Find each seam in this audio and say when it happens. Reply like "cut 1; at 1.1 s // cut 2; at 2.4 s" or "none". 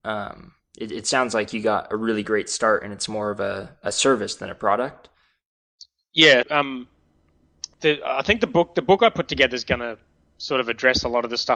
cut 1; at 6.4 s // cut 2; at 7.7 s